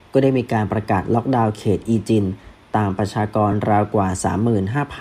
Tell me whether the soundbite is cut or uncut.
uncut